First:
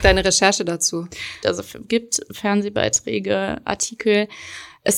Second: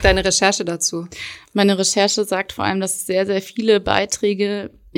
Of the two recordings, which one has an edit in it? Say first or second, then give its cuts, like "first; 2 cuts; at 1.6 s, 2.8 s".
first; 1 cut; at 1.4 s